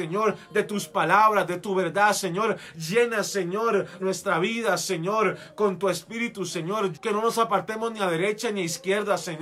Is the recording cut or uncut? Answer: cut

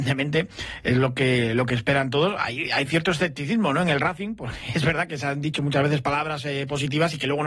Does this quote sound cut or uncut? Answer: uncut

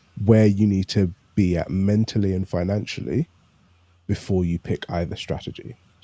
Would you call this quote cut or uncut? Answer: uncut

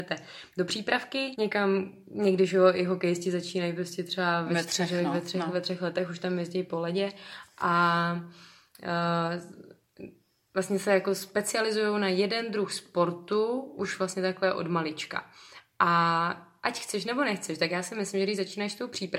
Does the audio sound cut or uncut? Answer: cut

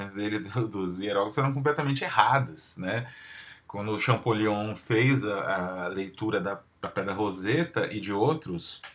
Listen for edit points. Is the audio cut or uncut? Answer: uncut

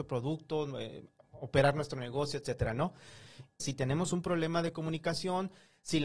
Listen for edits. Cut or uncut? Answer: cut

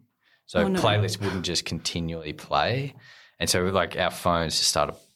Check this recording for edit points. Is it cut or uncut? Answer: uncut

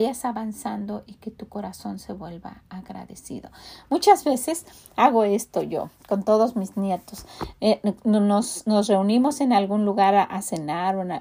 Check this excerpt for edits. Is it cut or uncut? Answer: uncut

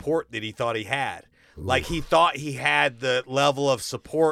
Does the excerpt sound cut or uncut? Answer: uncut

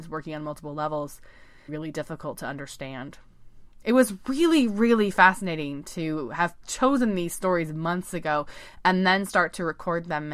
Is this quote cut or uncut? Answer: cut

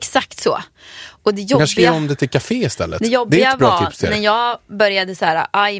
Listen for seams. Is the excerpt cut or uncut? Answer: uncut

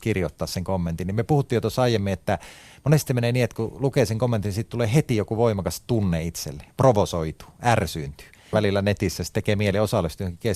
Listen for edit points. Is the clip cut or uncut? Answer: cut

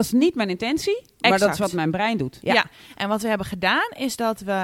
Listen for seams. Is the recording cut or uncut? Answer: cut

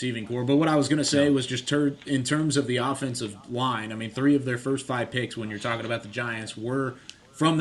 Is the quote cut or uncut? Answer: uncut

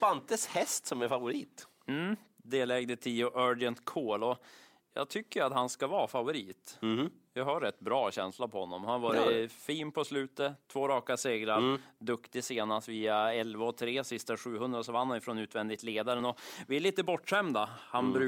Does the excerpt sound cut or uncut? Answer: uncut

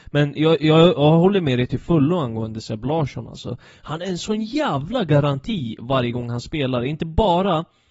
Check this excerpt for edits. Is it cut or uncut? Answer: uncut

